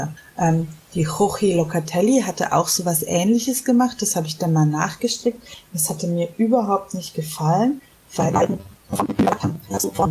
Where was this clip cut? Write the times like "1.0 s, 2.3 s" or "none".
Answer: none